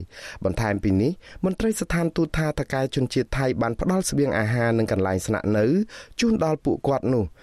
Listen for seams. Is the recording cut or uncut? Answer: uncut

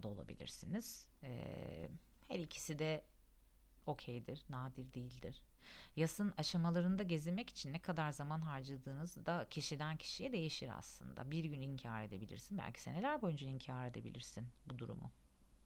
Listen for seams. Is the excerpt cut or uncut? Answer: uncut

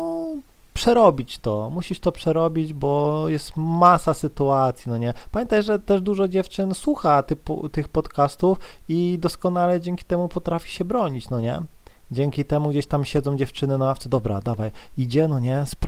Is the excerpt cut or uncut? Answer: uncut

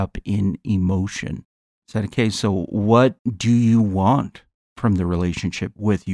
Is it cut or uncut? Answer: cut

